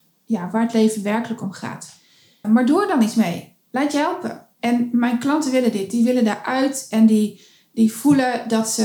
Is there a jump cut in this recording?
yes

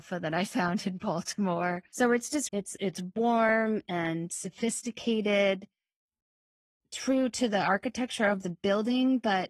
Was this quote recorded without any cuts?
no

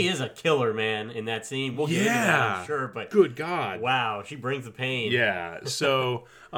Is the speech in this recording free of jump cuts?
yes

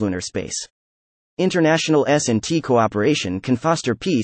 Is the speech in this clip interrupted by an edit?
yes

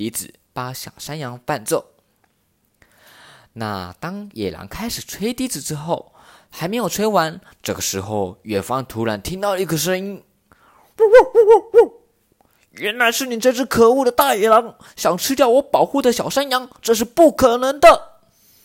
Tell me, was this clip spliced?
no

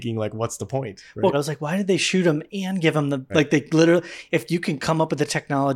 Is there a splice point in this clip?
yes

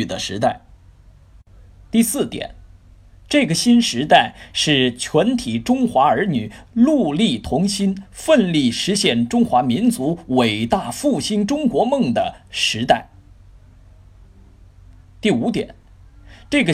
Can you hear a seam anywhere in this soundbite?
no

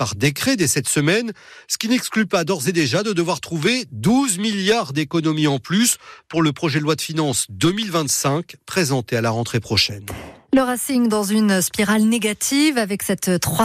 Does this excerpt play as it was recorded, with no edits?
yes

